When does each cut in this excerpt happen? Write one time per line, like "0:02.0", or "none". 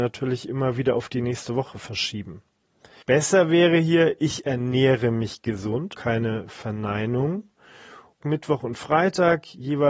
0:03.0
0:05.9
0:08.2